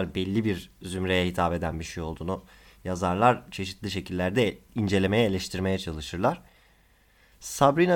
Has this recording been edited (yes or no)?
no